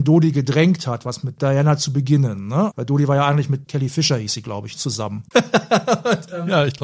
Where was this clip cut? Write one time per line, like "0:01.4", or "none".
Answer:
0:03.7
0:05.3